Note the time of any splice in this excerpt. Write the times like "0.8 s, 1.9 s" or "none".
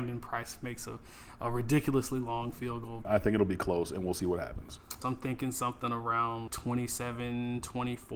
3.0 s, 5.0 s, 6.5 s